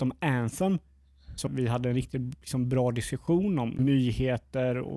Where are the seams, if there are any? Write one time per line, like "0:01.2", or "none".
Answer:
0:01.5
0:03.8